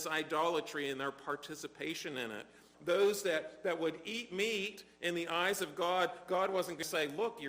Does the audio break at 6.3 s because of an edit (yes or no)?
no